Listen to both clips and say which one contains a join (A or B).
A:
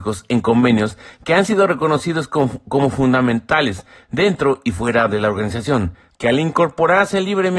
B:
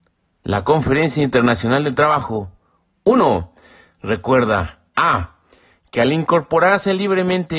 A